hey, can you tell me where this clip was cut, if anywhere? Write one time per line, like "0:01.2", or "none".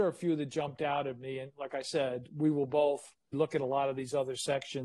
0:03.3

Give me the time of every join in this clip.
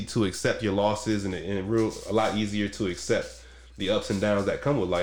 none

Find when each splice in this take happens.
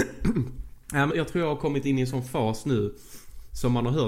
0:01.1

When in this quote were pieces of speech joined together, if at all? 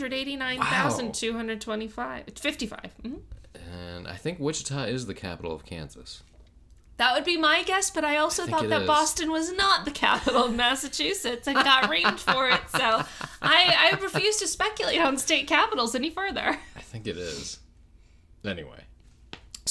none

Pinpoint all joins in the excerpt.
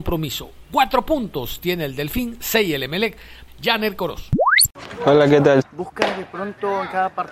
0:03.5
0:05.6

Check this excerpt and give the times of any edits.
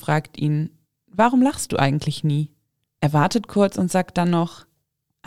0:02.9

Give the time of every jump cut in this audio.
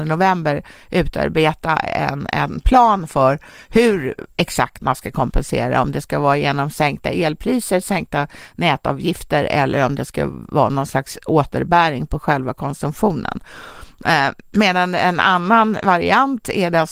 none

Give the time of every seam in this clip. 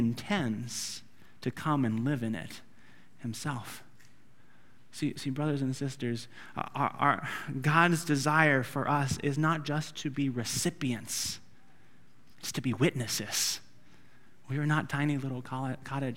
none

